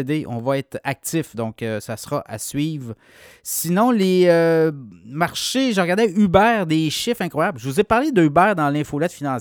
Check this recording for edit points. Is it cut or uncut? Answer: uncut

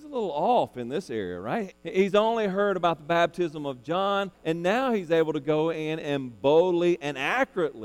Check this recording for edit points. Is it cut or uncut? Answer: cut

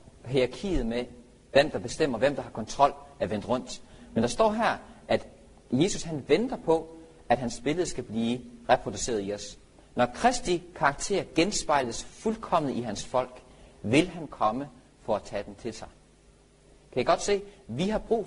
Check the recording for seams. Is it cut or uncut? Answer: uncut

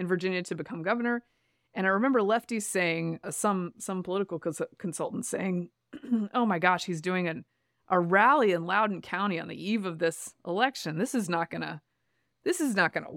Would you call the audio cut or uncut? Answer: uncut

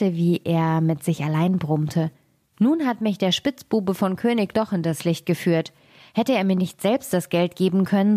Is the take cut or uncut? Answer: uncut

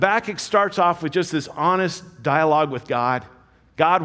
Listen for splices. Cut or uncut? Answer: uncut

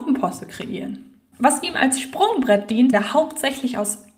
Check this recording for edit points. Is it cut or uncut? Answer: cut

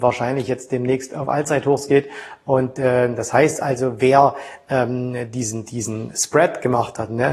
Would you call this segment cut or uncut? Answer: uncut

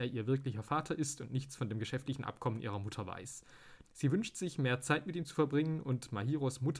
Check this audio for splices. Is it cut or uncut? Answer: cut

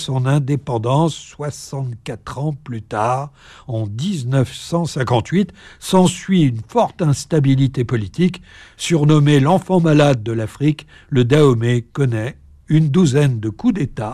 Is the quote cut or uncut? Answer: uncut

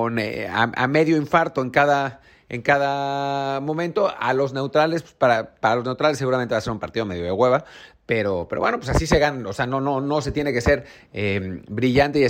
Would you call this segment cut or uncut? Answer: uncut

